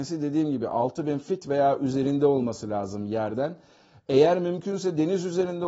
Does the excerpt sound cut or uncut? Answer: uncut